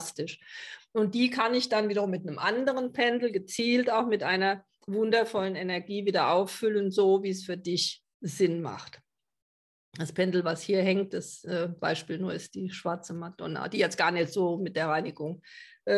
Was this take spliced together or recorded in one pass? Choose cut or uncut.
uncut